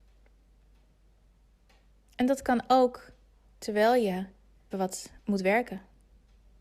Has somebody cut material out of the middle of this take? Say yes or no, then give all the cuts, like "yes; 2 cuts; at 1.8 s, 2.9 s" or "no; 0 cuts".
yes; 1 cut; at 4.7 s